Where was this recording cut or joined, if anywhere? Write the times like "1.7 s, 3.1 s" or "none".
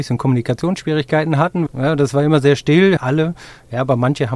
1.7 s, 3.0 s